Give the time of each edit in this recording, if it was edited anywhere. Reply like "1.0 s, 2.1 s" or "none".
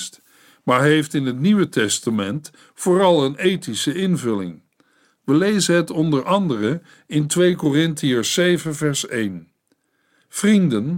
5.0 s